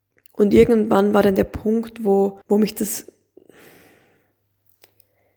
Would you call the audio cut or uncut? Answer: cut